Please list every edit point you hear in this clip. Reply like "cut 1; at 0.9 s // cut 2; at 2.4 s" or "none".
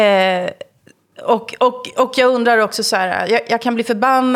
none